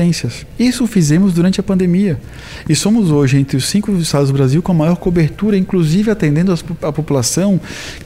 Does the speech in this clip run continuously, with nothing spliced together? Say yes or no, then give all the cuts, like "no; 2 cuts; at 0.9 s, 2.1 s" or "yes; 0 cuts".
yes; 0 cuts